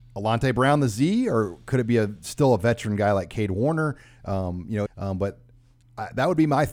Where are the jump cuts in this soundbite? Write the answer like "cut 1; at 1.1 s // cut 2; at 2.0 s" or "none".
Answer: cut 1; at 4.9 s